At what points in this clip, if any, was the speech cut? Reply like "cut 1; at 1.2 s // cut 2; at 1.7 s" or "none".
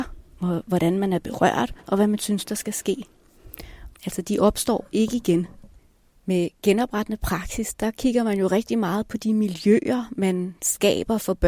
cut 1; at 3.9 s